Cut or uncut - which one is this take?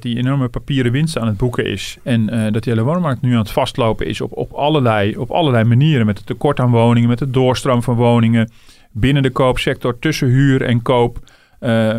cut